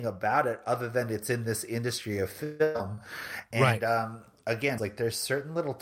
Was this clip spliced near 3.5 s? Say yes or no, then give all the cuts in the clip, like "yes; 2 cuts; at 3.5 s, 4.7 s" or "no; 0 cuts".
yes; 2 cuts; at 3.5 s, 4.8 s